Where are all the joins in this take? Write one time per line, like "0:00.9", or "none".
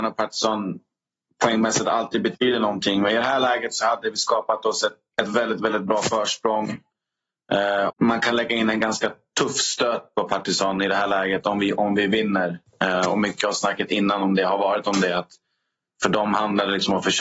0:07.9